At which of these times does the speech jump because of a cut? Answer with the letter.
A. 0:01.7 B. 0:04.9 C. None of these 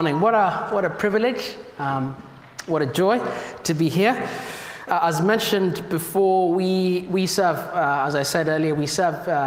B